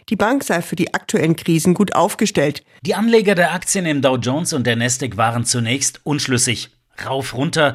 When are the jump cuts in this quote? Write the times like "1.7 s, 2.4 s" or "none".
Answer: 2.8 s